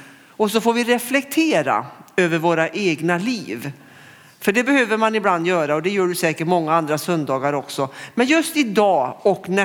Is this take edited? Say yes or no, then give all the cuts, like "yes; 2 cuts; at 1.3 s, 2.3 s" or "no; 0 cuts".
no; 0 cuts